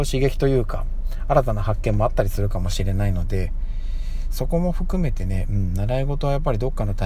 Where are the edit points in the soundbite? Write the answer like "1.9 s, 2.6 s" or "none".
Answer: none